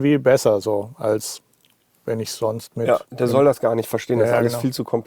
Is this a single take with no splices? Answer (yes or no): yes